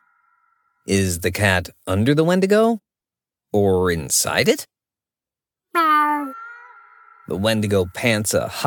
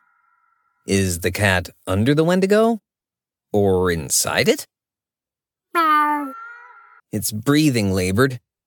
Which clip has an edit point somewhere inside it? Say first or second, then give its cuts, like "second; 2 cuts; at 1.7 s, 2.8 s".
second; 1 cut; at 7.0 s